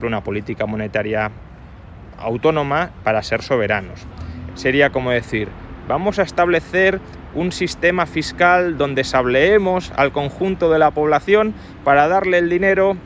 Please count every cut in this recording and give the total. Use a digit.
2